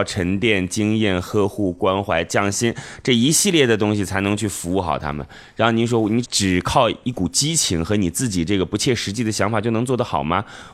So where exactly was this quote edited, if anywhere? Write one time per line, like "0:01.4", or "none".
0:06.2